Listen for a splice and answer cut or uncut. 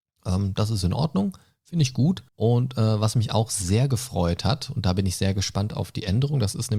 cut